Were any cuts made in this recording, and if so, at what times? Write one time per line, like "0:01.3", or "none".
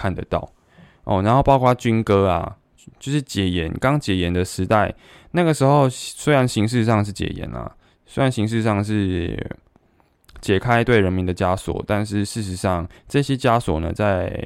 none